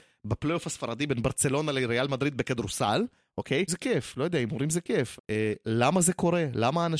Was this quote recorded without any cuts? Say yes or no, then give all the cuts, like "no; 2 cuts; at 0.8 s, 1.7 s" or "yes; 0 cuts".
no; 2 cuts; at 3.7 s, 5.2 s